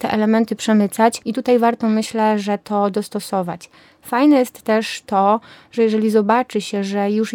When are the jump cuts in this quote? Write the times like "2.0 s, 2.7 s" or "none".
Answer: 1.2 s